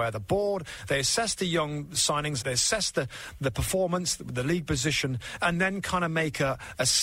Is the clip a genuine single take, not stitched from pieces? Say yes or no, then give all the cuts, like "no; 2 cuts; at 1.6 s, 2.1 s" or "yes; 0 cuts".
no; 1 cut; at 2.4 s